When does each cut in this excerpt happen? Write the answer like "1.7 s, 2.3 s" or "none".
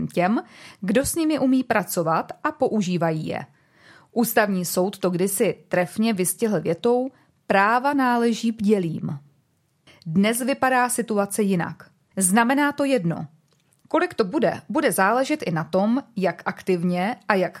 9.9 s, 12.1 s, 13.8 s